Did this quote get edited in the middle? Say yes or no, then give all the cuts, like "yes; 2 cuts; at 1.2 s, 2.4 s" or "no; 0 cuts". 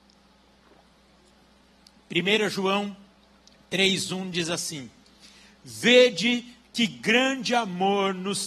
no; 0 cuts